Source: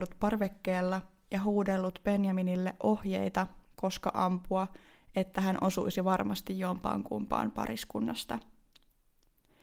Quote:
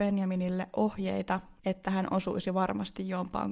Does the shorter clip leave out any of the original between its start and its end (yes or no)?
yes